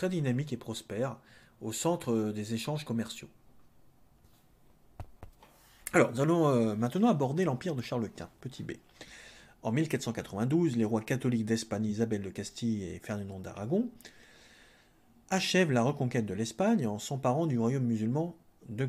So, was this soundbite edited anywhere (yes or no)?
no